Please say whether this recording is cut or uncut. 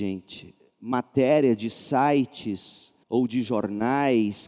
cut